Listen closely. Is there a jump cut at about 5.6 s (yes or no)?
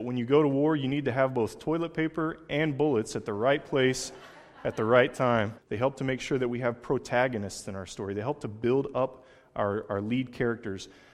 yes